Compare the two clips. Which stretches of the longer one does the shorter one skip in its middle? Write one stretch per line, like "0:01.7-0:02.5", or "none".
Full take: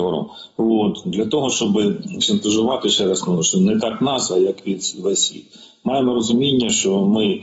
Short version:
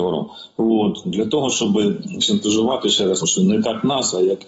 0:03.2-0:03.4

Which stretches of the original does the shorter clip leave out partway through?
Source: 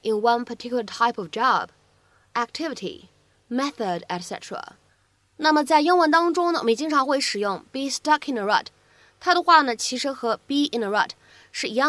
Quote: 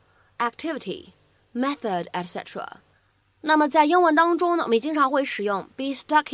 none

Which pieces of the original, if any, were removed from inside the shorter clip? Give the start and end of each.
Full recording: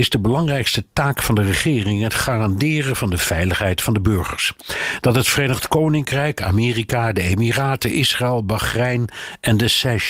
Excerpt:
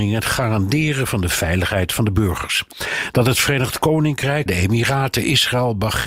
0:06.3-0:07.1

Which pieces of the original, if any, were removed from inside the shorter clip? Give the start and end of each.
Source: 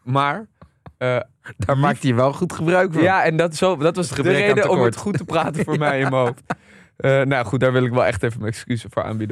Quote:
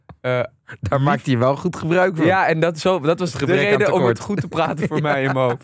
none

